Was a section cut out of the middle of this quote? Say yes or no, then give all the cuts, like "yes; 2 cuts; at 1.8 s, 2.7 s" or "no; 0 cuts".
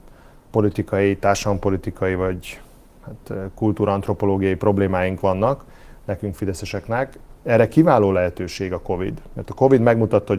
yes; 1 cut; at 7.4 s